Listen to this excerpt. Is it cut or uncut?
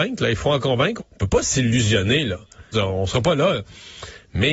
cut